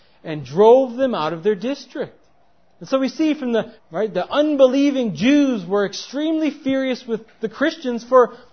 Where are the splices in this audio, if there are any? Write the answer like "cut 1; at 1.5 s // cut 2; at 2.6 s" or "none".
cut 1; at 3.8 s